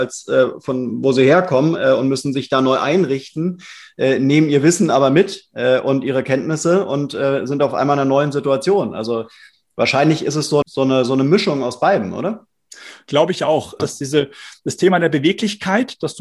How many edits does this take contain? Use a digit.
2